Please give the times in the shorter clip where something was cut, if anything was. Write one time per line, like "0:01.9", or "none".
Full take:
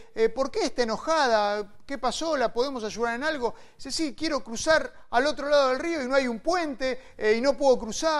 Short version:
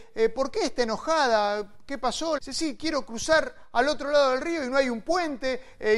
0:02.4